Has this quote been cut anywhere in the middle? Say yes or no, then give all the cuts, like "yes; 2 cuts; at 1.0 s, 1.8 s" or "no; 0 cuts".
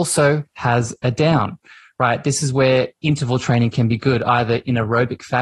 no; 0 cuts